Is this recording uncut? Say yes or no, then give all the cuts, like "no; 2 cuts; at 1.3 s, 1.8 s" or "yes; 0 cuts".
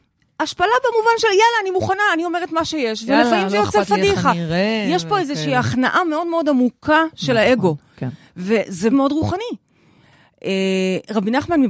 no; 1 cut; at 8.9 s